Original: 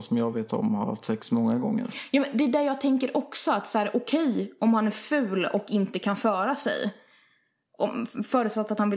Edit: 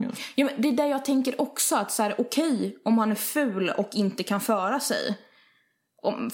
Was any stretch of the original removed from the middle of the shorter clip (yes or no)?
no